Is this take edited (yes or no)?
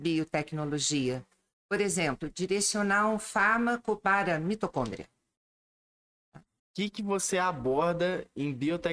yes